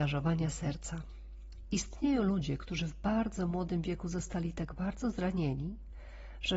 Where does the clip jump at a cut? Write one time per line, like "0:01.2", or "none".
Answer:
none